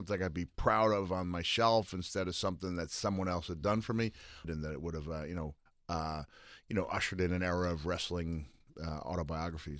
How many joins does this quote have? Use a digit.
1